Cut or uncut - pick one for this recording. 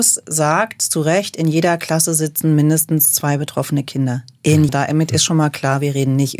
cut